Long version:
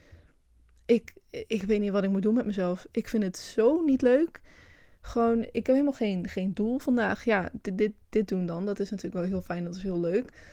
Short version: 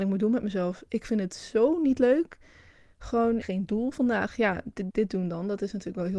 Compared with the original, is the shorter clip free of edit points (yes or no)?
no